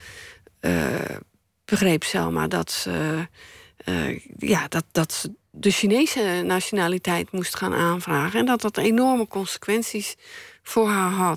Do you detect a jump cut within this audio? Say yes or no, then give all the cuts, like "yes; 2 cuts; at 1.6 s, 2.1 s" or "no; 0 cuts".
no; 0 cuts